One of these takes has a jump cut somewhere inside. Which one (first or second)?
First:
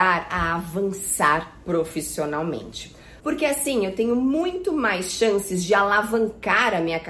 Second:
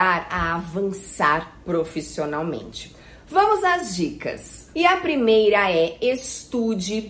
first